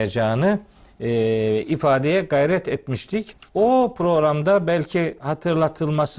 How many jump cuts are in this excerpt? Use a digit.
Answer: 1